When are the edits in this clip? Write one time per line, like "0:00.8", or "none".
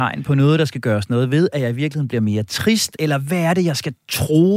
0:03.0